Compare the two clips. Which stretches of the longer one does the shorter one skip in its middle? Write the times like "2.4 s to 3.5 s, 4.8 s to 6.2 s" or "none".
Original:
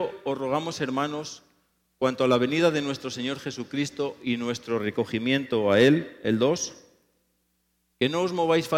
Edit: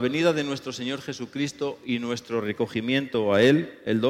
none